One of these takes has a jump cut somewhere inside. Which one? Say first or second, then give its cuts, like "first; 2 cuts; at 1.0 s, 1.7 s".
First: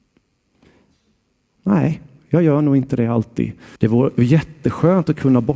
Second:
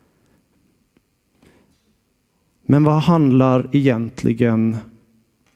first; 2 cuts; at 1.6 s, 3.8 s